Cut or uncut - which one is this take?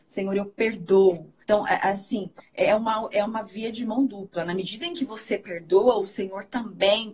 cut